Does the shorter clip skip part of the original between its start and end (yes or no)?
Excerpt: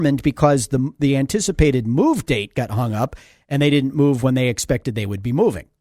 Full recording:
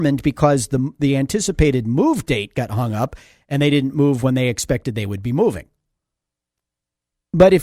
no